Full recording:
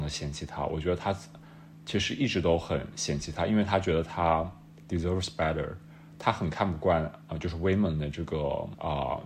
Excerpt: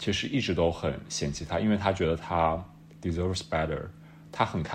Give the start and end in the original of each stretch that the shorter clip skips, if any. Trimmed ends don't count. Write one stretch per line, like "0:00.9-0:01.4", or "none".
none